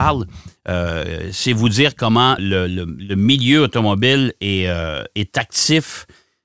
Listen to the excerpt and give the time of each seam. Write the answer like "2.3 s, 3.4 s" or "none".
2.4 s